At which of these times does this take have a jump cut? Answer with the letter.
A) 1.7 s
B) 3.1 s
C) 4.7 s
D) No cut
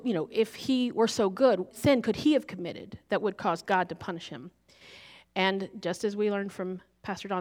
A